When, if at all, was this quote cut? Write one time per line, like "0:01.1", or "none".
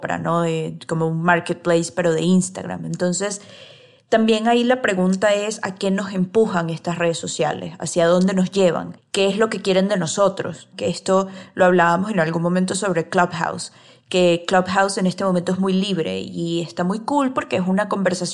none